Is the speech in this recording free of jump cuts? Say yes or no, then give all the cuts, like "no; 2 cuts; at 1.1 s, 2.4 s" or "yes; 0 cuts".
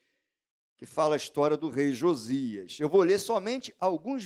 yes; 0 cuts